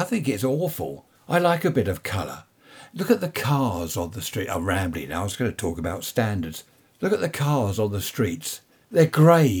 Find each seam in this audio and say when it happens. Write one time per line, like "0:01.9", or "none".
0:01.1

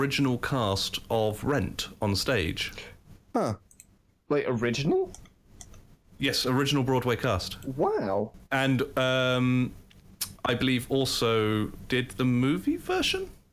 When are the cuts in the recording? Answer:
0:08.4

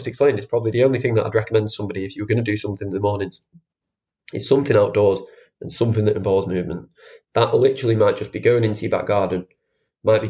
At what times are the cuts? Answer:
none

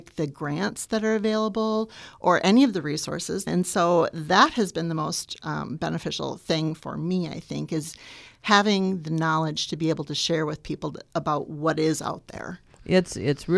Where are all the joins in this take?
0:03.5

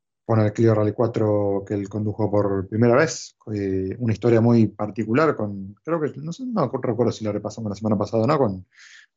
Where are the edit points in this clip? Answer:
none

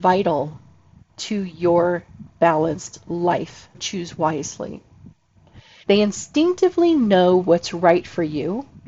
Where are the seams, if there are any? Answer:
0:03.7
0:05.8

